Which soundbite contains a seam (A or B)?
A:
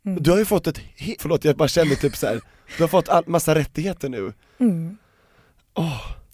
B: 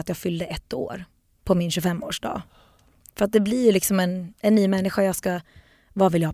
A